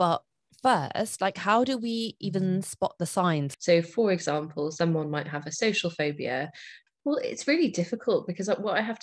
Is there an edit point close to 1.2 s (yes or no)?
no